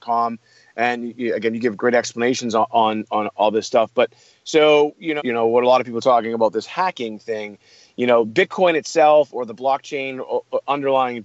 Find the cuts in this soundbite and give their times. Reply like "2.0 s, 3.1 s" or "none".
1.8 s, 5.2 s